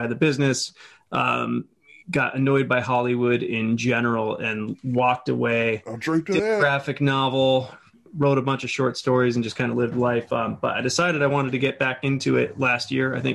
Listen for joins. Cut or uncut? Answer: uncut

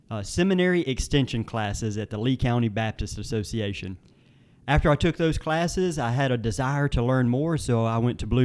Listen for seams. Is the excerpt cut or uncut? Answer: uncut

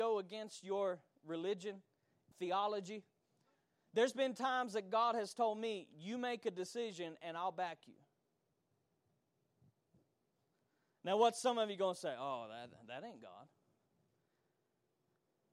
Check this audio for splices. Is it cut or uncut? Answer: cut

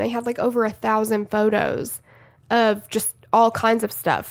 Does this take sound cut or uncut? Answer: uncut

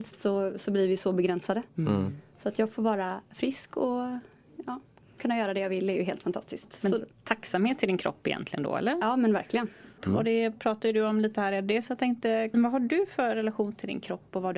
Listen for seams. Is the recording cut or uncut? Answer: cut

